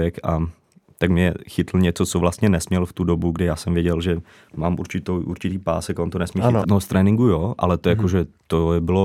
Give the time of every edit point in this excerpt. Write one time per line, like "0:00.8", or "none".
0:06.6